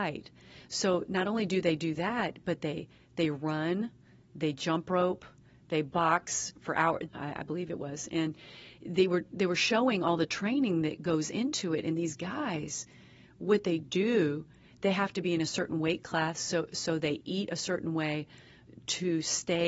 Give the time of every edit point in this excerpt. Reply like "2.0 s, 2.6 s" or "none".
7.1 s